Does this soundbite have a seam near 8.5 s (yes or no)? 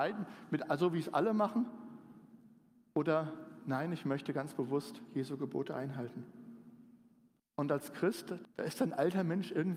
yes